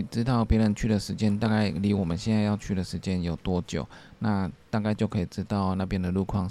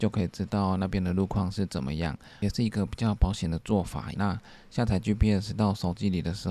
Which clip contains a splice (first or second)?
second